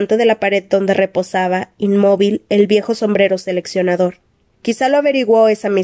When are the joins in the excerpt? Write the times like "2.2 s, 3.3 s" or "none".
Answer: 4.5 s